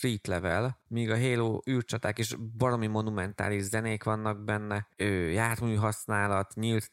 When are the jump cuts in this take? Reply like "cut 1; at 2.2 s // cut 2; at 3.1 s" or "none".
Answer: none